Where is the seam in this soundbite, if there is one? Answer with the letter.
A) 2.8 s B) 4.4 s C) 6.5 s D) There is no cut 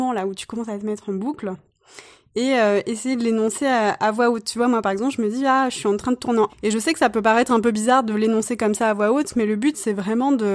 C